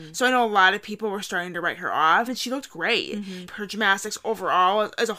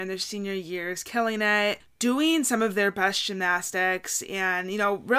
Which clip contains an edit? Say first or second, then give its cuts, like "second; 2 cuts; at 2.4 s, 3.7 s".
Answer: first; 2 cuts; at 2.3 s, 3.5 s